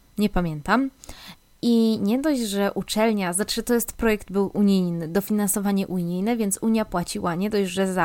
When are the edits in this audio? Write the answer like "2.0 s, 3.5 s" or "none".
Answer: none